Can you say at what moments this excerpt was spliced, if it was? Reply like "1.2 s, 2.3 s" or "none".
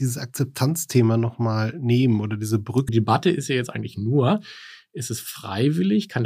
2.9 s